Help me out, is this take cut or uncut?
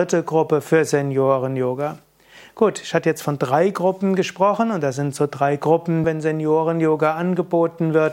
cut